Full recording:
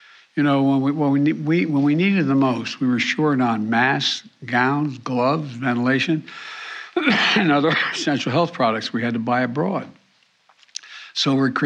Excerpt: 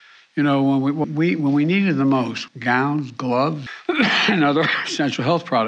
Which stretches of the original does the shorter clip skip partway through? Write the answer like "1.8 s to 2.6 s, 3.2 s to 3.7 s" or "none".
1.0 s to 1.3 s, 2.8 s to 4.3 s, 5.5 s to 6.7 s